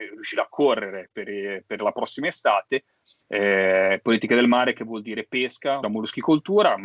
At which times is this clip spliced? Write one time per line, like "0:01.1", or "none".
0:03.2
0:05.8